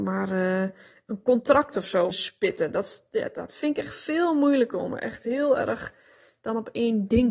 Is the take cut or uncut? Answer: cut